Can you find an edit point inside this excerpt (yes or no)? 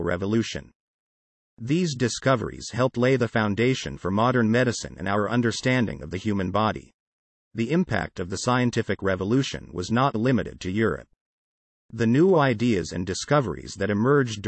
yes